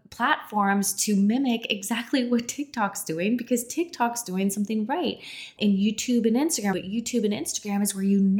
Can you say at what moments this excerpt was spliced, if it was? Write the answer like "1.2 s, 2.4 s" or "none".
5.6 s, 6.7 s